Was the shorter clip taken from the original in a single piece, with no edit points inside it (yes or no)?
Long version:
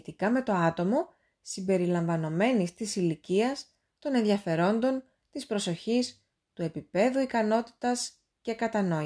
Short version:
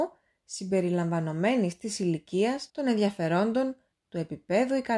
no